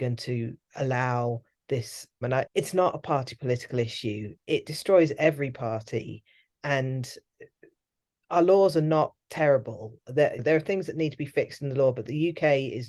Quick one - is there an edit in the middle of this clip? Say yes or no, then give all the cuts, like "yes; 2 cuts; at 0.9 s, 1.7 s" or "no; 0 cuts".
yes; 2 cuts; at 2.2 s, 9.2 s